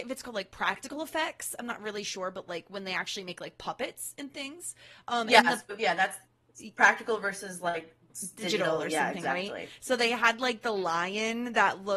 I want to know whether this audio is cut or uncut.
uncut